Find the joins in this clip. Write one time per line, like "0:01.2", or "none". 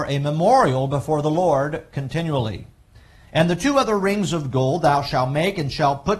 0:03.2